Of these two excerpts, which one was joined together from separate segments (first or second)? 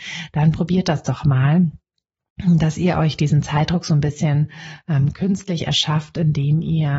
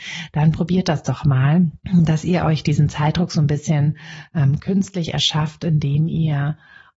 second